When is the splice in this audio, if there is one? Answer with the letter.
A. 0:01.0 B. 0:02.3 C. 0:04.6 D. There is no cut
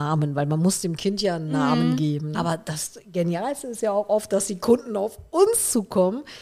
B